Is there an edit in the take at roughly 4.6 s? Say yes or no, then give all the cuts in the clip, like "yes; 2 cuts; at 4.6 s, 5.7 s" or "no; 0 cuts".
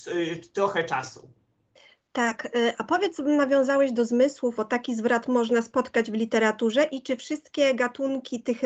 yes; 1 cut; at 4.6 s